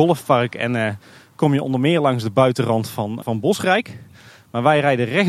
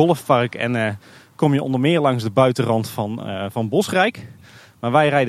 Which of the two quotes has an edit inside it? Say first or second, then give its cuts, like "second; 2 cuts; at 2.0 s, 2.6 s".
first; 1 cut; at 3.2 s